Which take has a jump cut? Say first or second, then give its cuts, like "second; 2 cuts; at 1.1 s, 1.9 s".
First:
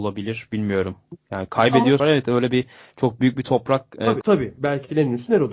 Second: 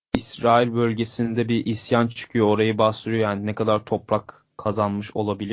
first; 2 cuts; at 2.0 s, 4.2 s